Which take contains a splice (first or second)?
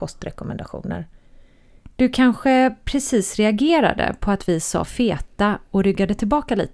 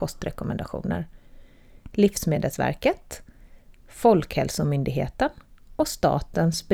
first